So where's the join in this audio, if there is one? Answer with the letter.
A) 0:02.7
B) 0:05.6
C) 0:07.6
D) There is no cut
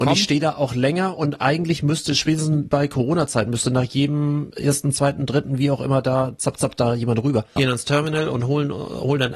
C